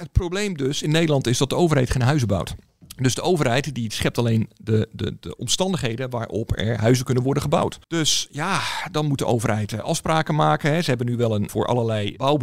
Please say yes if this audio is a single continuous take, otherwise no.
no